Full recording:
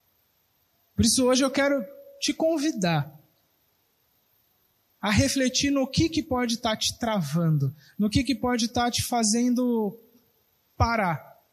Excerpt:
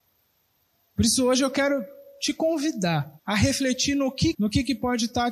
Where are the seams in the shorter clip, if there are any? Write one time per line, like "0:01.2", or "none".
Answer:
0:03.2
0:04.3